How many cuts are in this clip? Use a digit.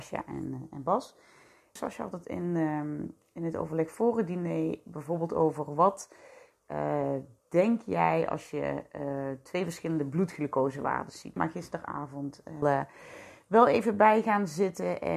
3